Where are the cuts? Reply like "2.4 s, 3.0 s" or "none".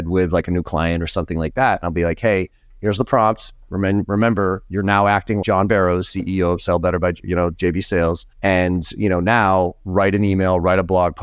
5.4 s, 8.3 s